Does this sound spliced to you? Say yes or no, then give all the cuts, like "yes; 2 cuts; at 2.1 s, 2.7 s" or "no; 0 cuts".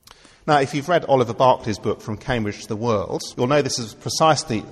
yes; 1 cut; at 3.3 s